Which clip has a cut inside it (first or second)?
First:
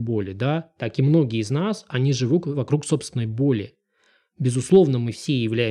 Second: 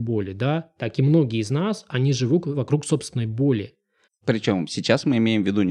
second